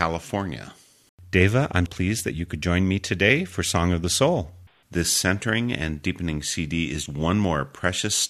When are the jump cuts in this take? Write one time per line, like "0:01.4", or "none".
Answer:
0:01.9
0:04.8
0:07.1